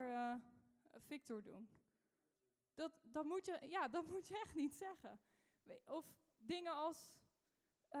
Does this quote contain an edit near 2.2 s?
no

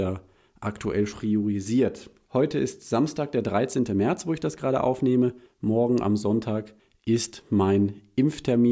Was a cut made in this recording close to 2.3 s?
yes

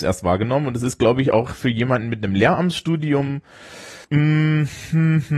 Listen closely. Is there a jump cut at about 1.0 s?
no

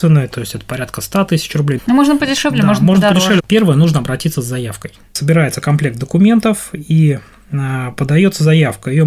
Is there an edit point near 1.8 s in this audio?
yes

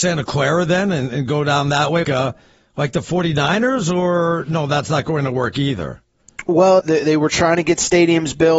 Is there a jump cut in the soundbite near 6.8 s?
yes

